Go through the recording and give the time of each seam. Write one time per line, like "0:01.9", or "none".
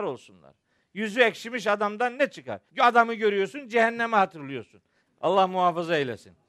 0:02.7
0:05.1